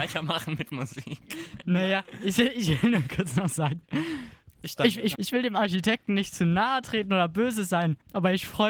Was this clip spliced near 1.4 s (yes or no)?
no